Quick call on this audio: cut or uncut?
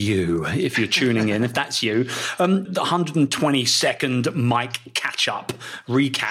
cut